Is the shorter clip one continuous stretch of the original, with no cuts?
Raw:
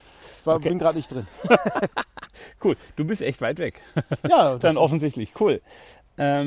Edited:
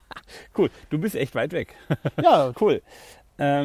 no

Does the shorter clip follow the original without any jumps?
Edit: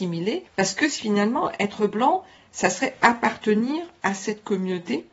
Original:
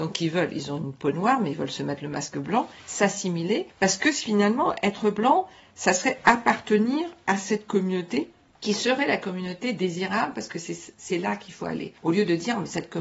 yes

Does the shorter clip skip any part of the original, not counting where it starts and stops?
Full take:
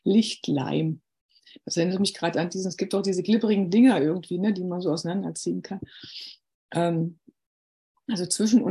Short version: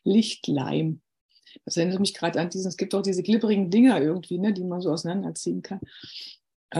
no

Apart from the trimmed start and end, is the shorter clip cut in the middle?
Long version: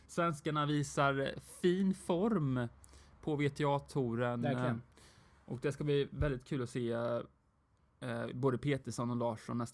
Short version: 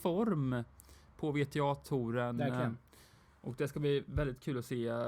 no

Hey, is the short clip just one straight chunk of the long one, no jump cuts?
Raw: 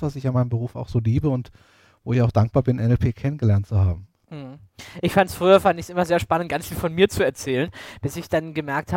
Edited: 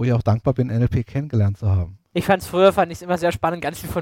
no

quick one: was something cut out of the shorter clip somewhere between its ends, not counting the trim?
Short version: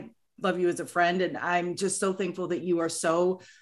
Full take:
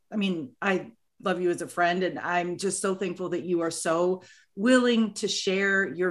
no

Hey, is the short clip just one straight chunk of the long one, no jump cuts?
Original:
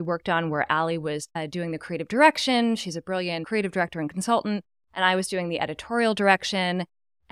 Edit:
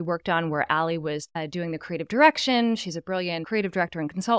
yes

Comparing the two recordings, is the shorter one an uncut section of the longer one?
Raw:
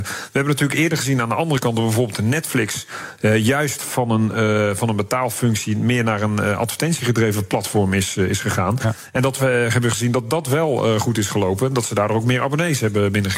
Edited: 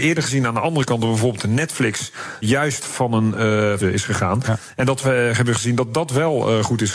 no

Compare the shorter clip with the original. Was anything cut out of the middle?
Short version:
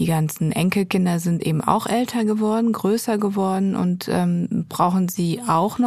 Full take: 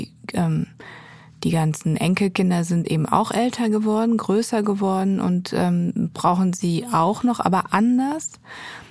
no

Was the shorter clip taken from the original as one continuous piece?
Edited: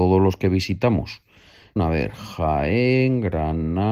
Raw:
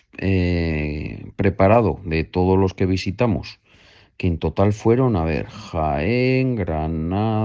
no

